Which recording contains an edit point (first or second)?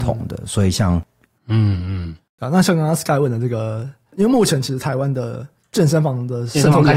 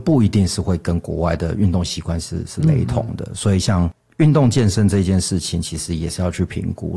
first